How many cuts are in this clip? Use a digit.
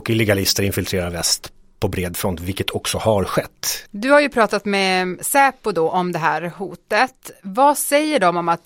1